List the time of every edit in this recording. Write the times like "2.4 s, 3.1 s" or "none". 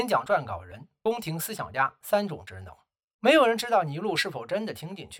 3.1 s